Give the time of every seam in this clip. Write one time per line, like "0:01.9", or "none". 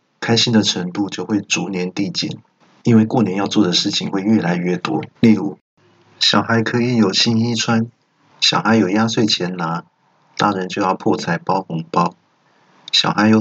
0:05.2
0:08.3